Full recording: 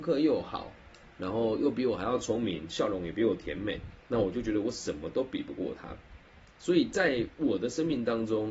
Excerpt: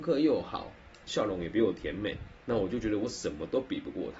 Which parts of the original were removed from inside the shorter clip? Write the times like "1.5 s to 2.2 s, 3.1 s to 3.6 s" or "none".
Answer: 1.1 s to 2.7 s